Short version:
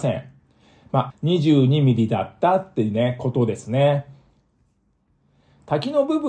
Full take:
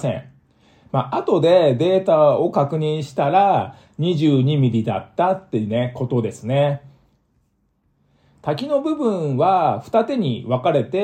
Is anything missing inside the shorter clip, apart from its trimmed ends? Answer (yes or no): yes